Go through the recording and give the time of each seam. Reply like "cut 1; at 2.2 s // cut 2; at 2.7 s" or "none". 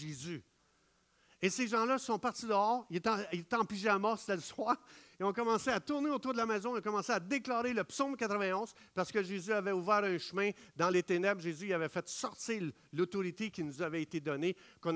none